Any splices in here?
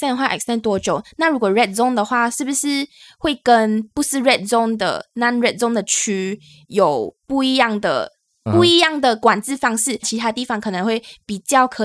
yes; 2 cuts; at 8.5 s, 10.0 s

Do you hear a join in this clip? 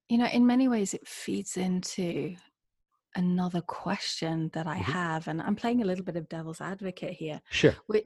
no; 0 cuts

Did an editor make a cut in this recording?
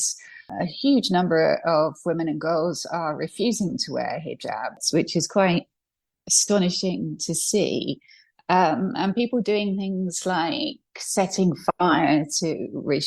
no; 0 cuts

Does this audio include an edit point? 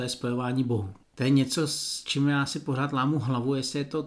no; 0 cuts

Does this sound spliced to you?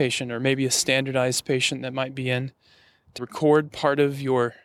yes; 1 cut; at 3.2 s

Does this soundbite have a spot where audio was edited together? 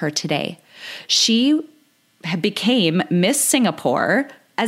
no; 0 cuts

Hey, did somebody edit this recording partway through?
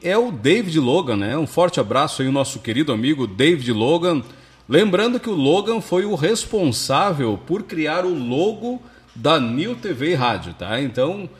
no; 0 cuts

